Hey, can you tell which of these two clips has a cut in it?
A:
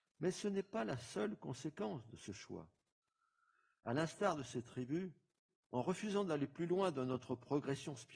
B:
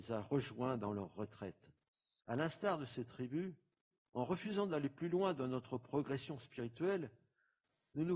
B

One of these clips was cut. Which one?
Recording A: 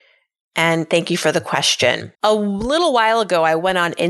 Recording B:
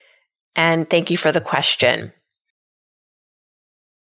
A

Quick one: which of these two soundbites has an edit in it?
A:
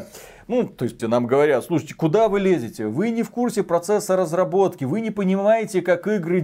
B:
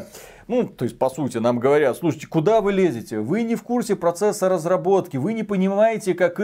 A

